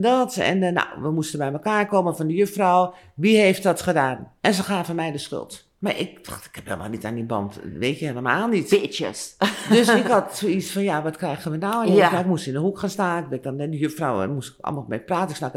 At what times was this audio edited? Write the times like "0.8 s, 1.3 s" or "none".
4.4 s, 5.7 s